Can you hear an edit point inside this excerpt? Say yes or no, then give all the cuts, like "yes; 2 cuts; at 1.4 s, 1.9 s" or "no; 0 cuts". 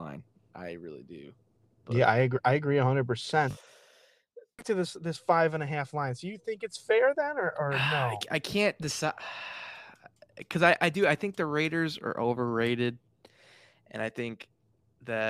no; 0 cuts